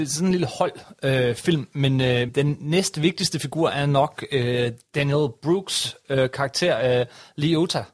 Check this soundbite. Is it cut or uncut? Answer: cut